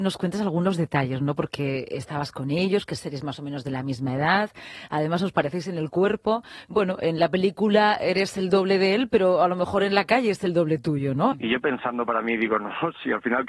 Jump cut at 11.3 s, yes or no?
yes